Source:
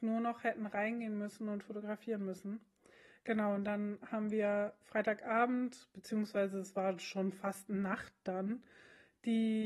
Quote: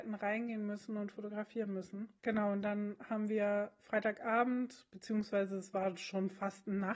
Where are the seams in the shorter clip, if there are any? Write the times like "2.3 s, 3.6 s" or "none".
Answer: 2.2 s